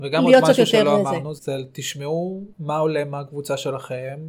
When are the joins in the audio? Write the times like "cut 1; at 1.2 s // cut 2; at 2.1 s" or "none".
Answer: cut 1; at 1.4 s // cut 2; at 2.5 s